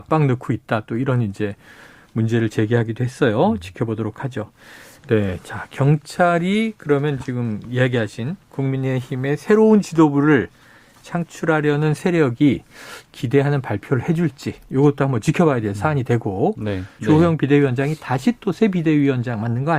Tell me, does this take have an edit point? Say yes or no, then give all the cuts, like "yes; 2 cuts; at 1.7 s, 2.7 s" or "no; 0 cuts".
yes; 2 cuts; at 5.0 s, 17.0 s